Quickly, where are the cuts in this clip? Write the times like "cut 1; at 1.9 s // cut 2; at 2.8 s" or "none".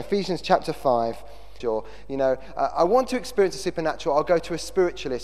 cut 1; at 1.6 s